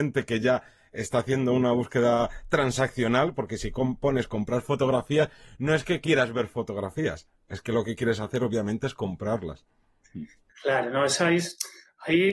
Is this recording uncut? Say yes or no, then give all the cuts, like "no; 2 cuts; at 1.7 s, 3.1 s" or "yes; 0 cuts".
yes; 0 cuts